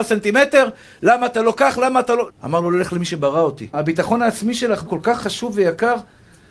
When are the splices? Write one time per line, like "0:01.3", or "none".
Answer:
0:02.3
0:03.7
0:04.9